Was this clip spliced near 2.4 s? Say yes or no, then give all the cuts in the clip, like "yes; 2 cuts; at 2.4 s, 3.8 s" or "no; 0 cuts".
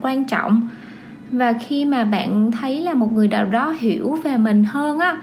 no; 0 cuts